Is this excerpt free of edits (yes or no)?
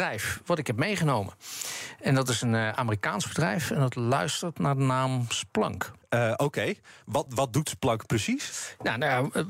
no